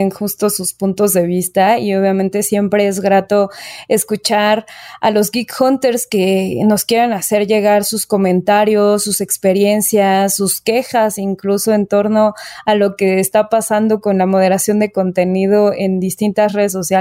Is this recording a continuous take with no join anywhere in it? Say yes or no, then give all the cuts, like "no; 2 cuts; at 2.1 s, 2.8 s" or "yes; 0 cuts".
yes; 0 cuts